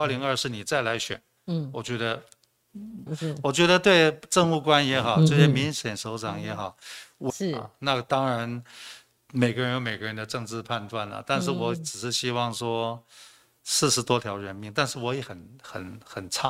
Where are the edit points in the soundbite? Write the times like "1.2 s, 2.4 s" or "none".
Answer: 3.1 s, 7.3 s

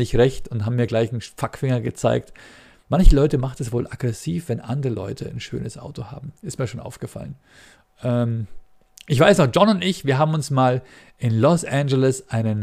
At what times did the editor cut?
none

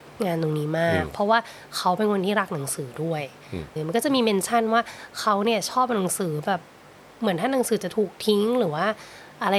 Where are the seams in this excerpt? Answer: 3.8 s

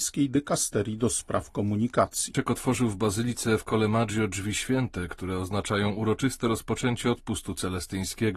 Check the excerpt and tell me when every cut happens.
2.3 s

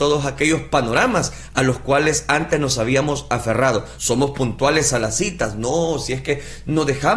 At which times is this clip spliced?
none

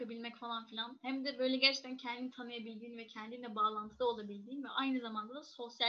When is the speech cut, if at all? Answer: none

